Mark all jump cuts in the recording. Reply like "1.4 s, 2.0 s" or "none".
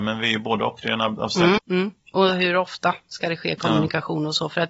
1.6 s